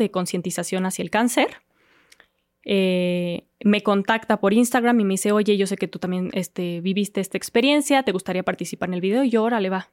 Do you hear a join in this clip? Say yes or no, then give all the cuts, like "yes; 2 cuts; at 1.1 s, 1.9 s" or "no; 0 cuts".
no; 0 cuts